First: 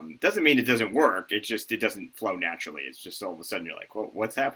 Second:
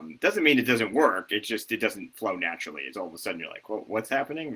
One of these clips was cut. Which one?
second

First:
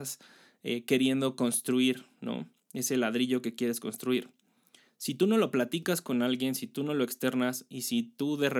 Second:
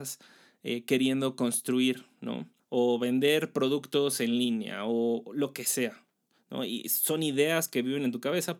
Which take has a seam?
second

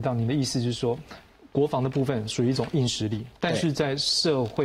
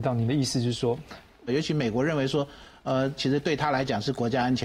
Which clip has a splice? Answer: second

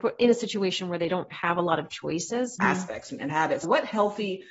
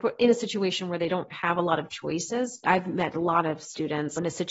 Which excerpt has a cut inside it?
first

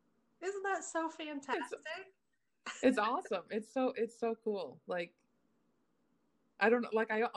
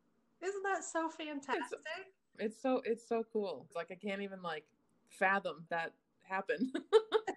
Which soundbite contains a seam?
second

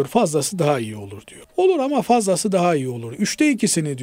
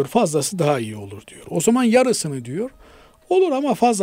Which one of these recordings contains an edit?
first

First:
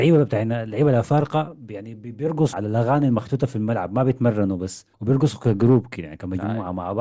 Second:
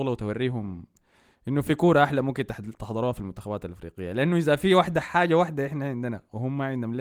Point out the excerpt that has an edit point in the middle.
first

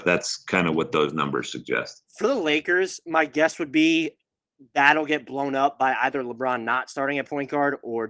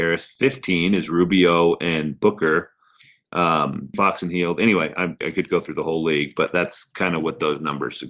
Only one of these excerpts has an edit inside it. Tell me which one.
second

